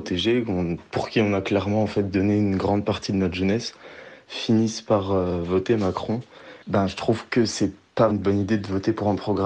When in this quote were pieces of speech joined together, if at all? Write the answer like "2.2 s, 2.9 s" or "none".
6.6 s, 8.1 s